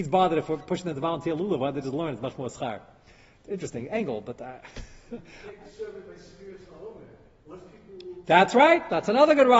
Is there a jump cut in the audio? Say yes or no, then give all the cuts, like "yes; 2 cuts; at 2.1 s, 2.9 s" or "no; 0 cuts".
no; 0 cuts